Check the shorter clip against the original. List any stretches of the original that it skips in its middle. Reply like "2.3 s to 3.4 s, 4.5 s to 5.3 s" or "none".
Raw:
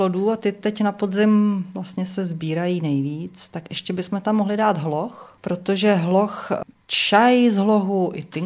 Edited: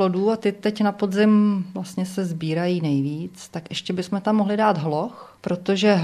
none